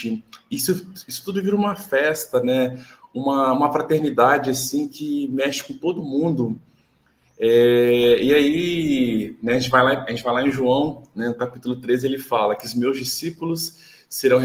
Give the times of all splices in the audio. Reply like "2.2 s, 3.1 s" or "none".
none